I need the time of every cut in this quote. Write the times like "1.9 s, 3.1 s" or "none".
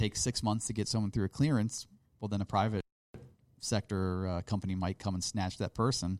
none